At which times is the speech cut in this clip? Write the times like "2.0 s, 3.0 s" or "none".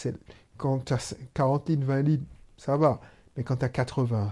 none

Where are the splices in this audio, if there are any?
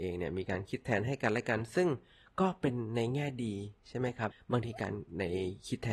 4.3 s

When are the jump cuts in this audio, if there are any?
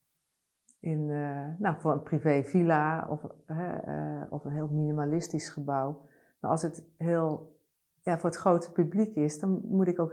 none

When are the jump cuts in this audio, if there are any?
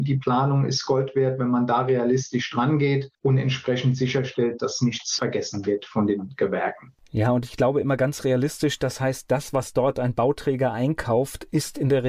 none

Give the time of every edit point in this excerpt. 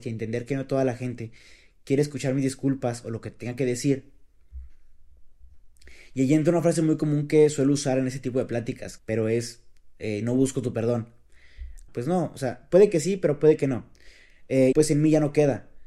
9.0 s, 11.9 s, 14.7 s

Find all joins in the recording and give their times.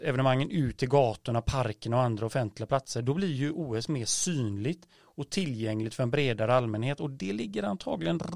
none

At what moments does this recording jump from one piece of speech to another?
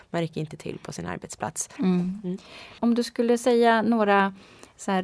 1.8 s

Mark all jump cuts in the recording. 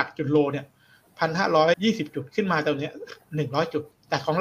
1.7 s

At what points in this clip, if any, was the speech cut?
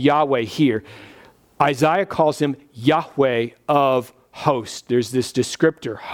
none

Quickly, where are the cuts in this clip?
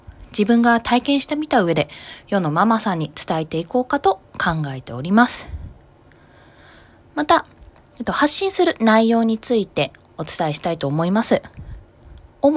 none

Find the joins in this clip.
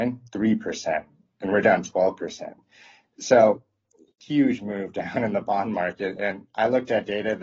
none

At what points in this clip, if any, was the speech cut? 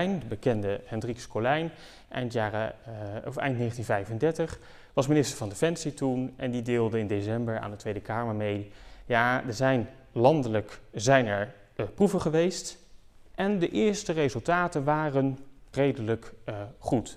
13.3 s, 15.7 s

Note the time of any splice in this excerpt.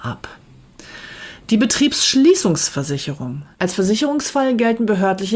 3.5 s

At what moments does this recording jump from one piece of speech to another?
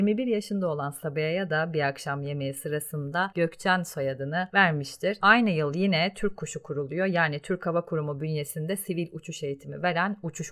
none

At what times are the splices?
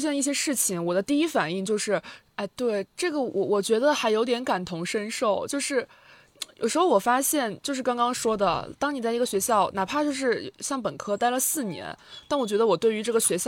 2.3 s

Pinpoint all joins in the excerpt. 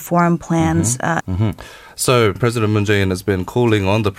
1.2 s, 2.3 s

